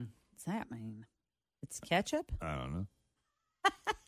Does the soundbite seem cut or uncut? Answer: uncut